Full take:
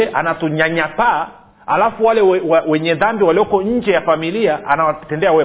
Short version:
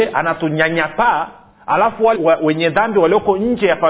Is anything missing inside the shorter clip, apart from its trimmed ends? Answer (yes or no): yes